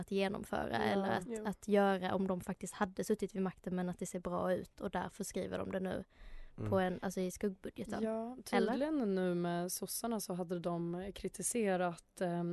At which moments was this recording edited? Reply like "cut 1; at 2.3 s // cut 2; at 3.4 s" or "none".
none